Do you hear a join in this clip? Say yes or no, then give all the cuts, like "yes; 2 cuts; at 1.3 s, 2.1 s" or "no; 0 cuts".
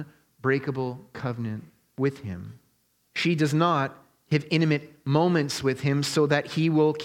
yes; 1 cut; at 3.0 s